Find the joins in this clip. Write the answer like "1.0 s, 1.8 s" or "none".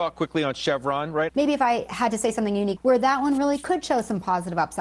1.3 s, 2.8 s